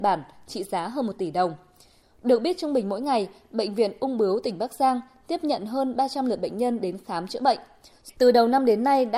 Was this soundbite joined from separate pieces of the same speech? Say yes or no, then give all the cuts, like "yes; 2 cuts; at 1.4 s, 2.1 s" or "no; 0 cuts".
yes; 2 cuts; at 2.0 s, 8.1 s